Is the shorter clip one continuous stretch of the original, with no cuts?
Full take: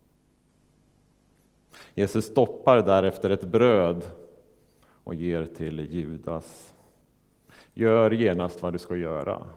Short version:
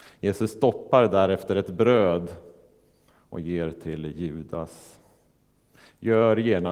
yes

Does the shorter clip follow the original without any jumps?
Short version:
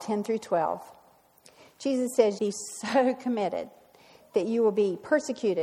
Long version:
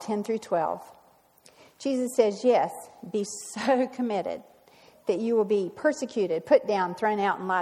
no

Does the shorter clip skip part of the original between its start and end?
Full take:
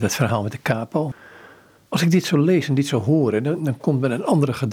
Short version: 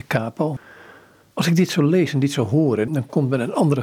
yes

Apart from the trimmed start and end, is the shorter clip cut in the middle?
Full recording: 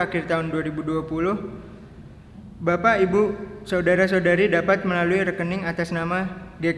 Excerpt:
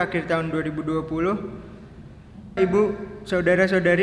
yes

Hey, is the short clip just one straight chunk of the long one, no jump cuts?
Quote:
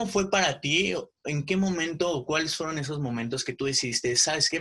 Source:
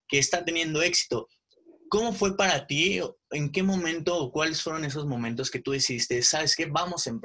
yes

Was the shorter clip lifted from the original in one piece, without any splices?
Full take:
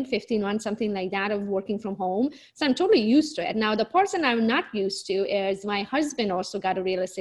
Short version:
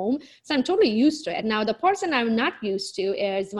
yes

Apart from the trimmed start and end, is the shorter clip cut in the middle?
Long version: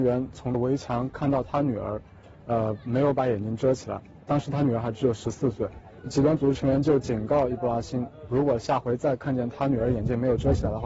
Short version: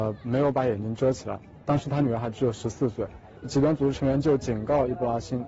no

